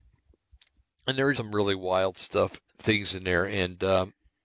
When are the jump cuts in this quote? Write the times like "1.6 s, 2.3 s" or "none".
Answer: 1.3 s, 2.7 s